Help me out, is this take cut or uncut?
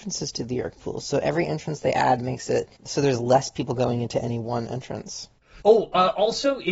cut